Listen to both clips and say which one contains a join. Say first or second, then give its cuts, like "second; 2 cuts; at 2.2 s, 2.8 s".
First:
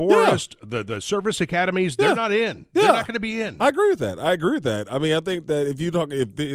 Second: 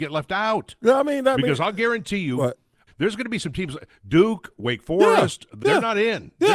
second; 2 cuts; at 2.9 s, 5.6 s